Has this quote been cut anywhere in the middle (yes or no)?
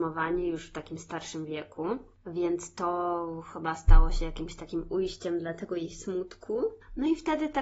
no